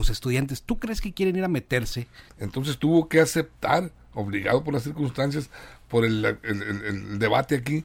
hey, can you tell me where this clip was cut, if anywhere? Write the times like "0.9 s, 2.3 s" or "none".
2.3 s

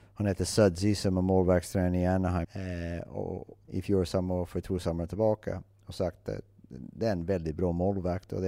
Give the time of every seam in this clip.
2.4 s, 3.7 s

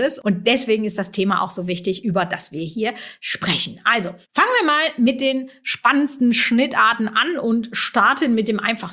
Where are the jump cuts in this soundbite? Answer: 4.2 s

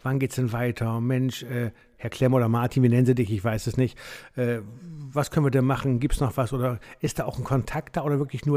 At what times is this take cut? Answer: none

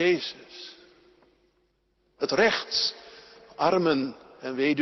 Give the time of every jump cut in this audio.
2.2 s

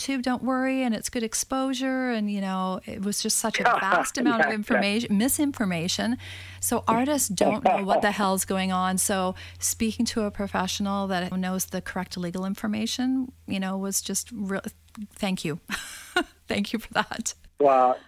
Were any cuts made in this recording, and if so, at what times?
11.3 s

